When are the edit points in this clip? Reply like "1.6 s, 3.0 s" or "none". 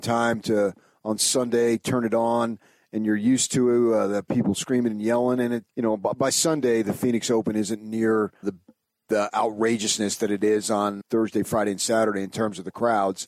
5.7 s, 8.4 s, 11.0 s